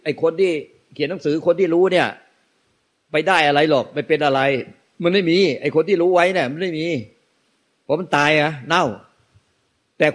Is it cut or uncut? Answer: uncut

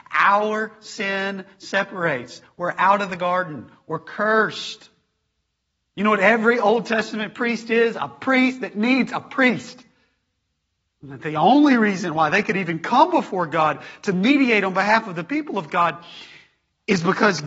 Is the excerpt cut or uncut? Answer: cut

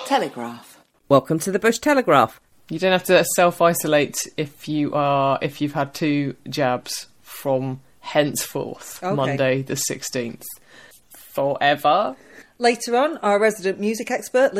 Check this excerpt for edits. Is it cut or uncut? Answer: cut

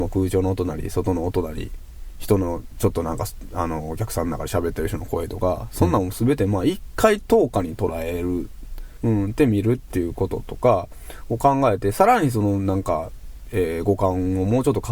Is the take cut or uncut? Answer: cut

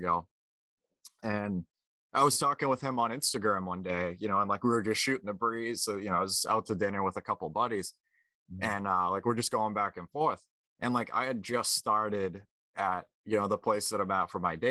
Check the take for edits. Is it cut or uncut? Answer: uncut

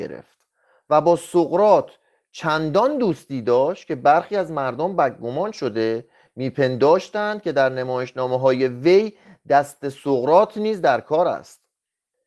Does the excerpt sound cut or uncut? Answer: uncut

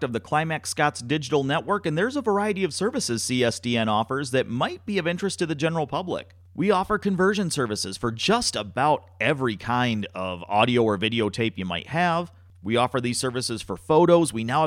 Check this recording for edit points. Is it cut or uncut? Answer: uncut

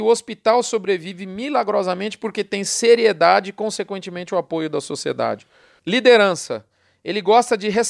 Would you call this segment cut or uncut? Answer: cut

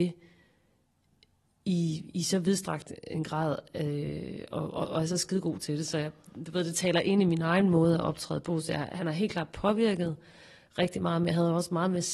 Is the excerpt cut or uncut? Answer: uncut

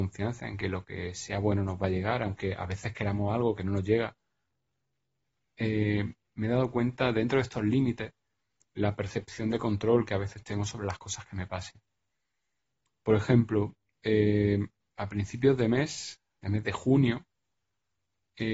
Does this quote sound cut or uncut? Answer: uncut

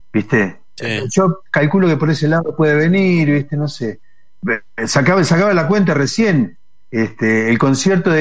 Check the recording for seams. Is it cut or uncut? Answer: uncut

